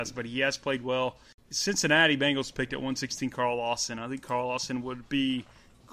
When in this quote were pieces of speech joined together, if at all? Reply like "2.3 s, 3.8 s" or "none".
none